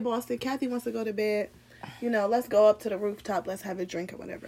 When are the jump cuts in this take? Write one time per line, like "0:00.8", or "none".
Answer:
none